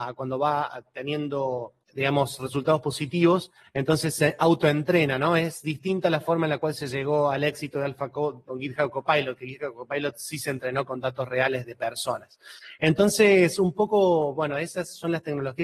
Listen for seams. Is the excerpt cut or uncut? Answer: cut